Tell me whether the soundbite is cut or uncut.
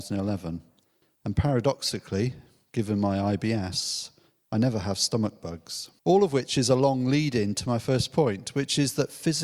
cut